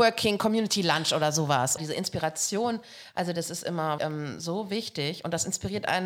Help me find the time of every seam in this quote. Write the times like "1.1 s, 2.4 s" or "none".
1.8 s, 4.0 s